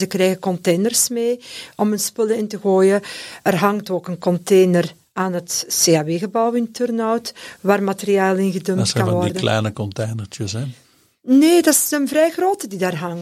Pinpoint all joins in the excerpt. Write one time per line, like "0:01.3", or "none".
none